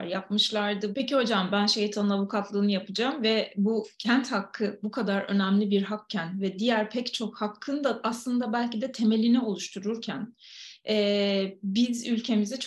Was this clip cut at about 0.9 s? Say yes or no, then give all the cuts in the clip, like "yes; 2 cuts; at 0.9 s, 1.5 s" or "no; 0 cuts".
yes; 1 cut; at 0.9 s